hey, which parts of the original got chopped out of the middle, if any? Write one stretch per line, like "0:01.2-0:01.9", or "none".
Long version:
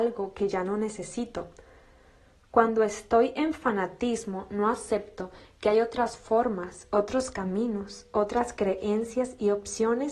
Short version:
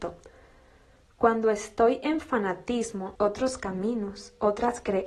0:04.5-0:06.9